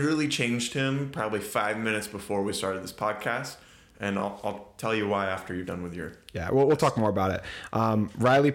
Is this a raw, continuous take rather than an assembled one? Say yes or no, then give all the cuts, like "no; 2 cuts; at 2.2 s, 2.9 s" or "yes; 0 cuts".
yes; 0 cuts